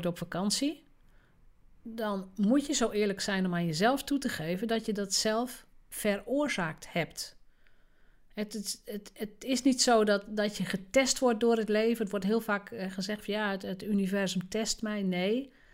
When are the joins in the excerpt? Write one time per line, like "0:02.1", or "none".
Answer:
none